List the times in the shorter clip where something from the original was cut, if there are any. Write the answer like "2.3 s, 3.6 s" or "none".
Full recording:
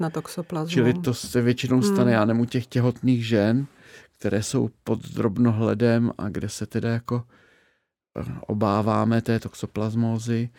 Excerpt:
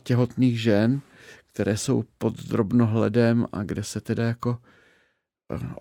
none